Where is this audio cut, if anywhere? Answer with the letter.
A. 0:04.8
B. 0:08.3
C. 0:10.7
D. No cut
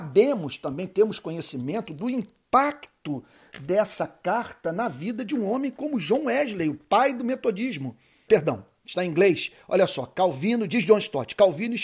B